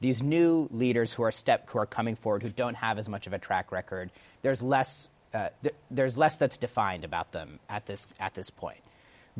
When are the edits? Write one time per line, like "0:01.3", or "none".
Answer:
none